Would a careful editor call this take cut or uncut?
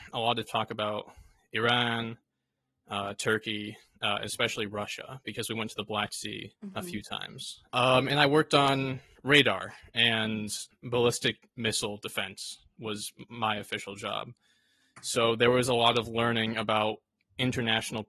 cut